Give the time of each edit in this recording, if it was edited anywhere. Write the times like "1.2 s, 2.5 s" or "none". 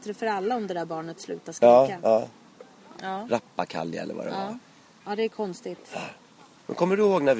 2.9 s, 5.0 s